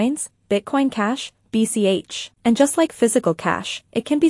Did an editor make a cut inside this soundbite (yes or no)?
yes